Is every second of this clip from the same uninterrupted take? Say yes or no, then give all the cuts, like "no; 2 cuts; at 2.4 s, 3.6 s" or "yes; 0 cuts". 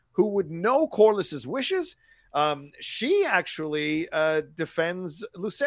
yes; 0 cuts